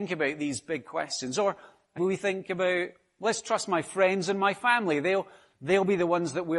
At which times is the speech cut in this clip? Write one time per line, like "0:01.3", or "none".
0:02.0